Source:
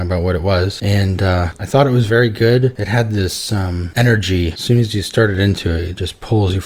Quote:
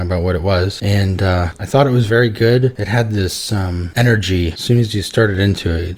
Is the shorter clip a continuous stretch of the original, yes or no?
yes